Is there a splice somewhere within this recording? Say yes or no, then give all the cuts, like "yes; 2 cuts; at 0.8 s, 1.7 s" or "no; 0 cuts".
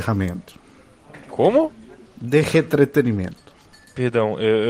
no; 0 cuts